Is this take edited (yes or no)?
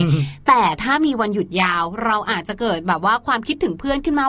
no